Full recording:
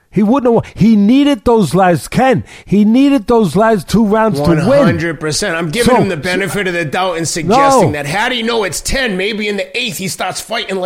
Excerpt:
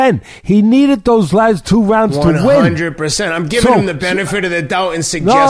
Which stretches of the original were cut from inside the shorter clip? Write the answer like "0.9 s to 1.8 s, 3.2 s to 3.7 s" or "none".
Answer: none